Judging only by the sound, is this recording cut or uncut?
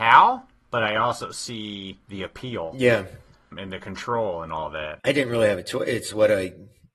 uncut